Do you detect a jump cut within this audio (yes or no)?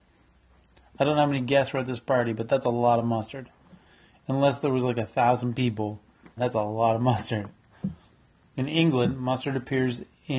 yes